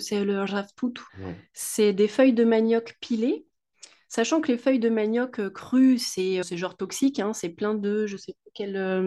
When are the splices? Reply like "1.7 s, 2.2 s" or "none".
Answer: 1.1 s, 6.4 s